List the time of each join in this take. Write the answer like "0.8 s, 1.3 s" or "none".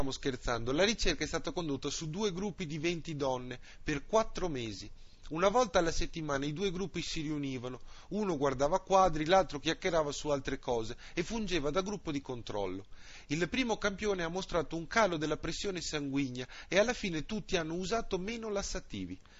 none